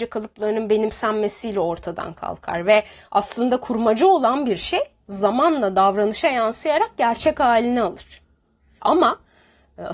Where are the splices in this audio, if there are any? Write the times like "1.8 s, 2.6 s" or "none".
8.8 s